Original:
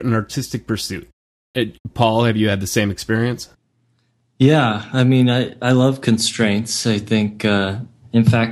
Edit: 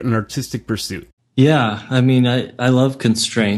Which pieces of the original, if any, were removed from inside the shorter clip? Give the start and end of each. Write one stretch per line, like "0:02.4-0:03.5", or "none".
0:01.2-0:04.2